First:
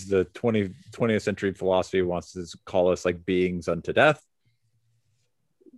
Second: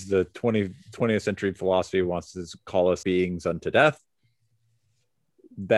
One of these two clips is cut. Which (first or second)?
second